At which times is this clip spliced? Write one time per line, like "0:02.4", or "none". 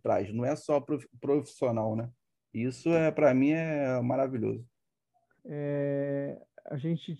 0:05.4